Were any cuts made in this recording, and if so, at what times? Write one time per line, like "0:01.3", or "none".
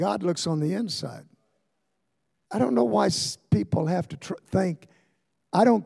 0:02.4